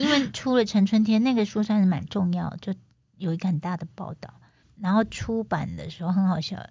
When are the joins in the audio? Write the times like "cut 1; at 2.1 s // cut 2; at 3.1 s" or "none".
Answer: cut 1; at 4.6 s

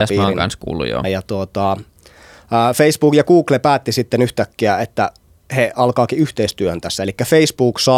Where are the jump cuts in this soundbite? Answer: cut 1; at 1.0 s

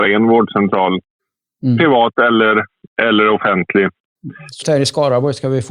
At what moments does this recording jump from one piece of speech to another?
cut 1; at 4.6 s

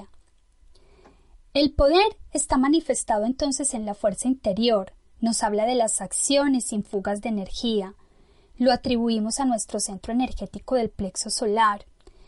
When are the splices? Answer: none

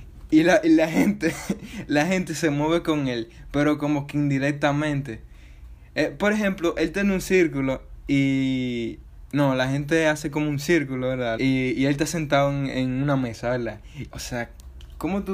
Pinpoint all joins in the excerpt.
cut 1; at 11.4 s // cut 2; at 14.1 s

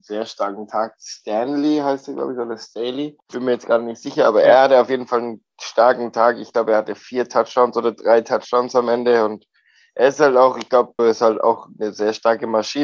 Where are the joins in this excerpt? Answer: cut 1; at 11.0 s

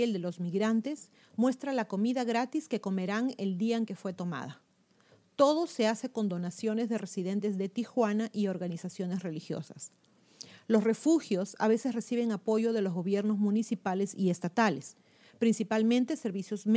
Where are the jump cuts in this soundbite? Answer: none

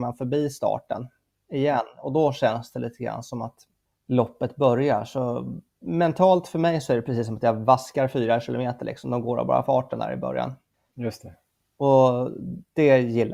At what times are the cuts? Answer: none

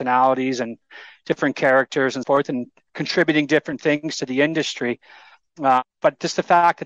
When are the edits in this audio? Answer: cut 1; at 2.2 s

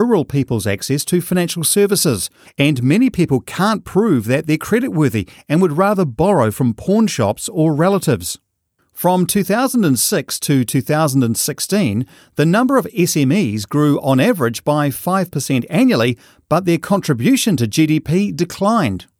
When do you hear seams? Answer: cut 1; at 2.4 s

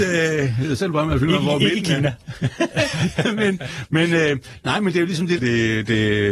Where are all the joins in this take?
cut 1; at 5.4 s

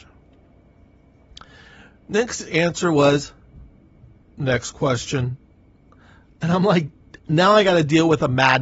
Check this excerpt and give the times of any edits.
cut 1; at 7.2 s

